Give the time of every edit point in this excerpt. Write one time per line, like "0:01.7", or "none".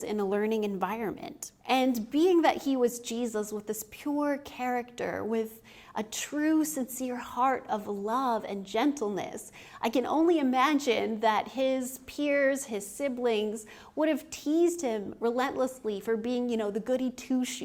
0:01.6